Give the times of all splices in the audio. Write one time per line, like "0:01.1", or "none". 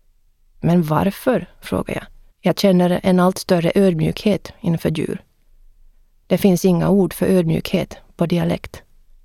0:02.3